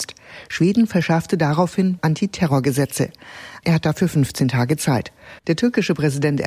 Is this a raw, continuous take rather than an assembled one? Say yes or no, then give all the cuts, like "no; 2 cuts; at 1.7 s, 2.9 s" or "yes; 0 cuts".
no; 3 cuts; at 2.0 s, 3.6 s, 5.4 s